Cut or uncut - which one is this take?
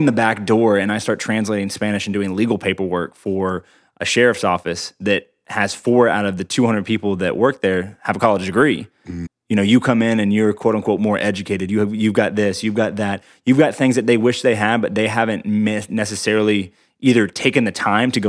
cut